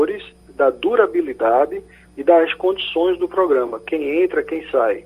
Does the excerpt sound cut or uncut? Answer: uncut